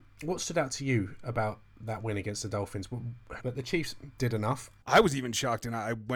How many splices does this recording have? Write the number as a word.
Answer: two